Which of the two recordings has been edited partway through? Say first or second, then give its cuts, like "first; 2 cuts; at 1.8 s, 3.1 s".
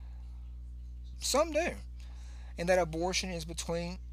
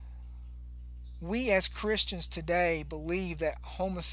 first; 1 cut; at 1.1 s